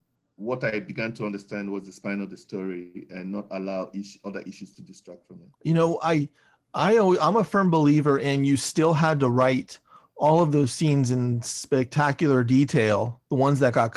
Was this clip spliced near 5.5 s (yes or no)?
yes